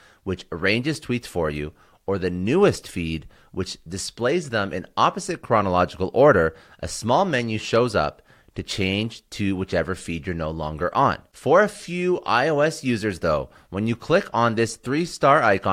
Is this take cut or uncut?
uncut